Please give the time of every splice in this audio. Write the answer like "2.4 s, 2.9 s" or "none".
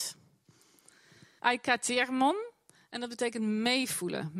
1.4 s

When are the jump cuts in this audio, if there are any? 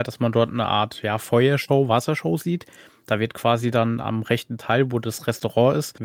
none

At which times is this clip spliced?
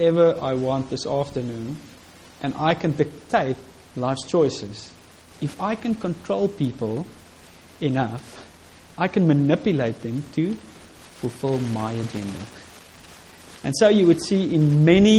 5.3 s

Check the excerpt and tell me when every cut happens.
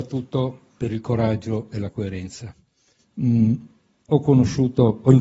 3.0 s

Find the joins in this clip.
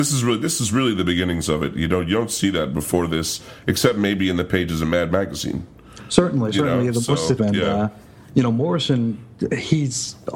7.4 s

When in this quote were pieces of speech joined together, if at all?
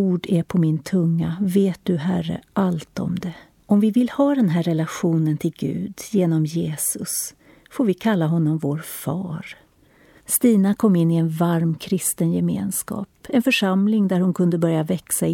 3.6 s, 10.2 s

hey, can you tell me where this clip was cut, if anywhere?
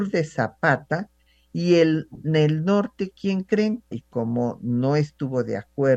3.9 s

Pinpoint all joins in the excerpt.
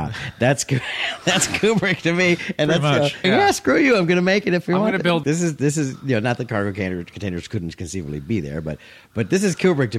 3.2 s, 5.2 s

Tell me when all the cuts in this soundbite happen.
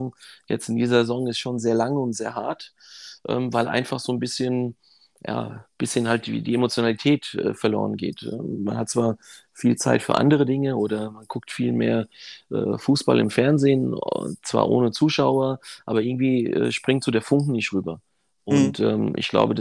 none

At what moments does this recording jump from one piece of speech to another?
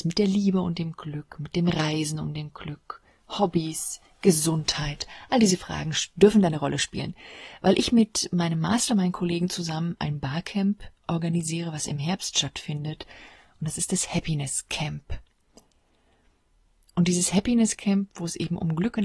none

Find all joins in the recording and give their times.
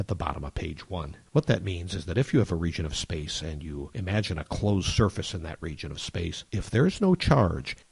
1.3 s

